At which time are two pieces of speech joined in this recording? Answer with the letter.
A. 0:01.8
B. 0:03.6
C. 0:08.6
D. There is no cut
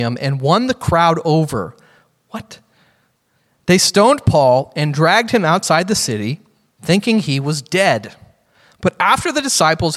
D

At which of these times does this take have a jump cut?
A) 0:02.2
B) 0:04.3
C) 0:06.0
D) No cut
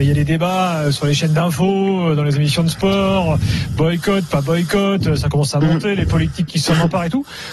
D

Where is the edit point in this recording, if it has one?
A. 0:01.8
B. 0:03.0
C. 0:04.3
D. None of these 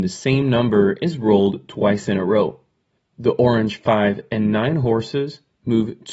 B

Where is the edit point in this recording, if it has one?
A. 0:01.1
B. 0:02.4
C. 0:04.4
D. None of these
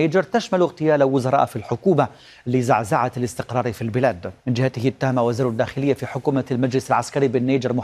C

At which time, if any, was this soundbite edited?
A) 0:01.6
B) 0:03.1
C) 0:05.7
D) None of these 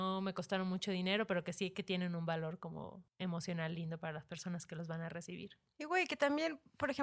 B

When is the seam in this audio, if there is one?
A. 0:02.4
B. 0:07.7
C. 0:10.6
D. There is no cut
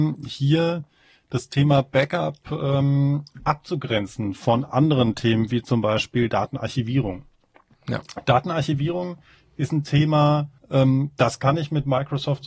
C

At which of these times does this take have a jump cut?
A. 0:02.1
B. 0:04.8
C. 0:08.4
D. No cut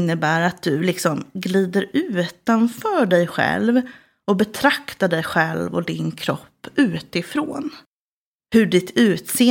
C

